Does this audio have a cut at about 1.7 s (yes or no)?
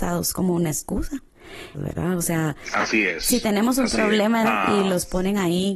yes